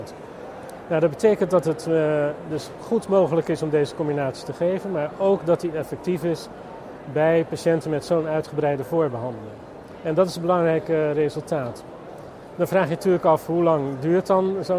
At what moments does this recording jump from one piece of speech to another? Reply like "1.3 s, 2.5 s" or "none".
none